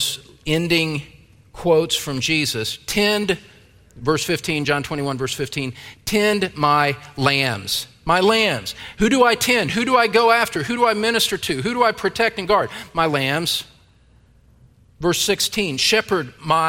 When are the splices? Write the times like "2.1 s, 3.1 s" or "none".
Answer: none